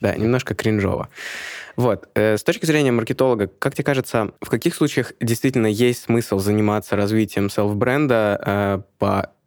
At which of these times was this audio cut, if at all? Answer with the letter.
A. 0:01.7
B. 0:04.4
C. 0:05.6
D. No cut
B